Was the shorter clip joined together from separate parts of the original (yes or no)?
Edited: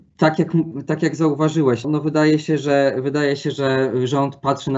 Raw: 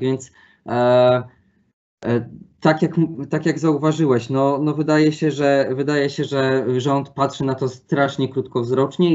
yes